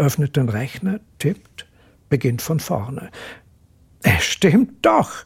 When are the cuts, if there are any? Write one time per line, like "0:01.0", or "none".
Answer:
0:02.0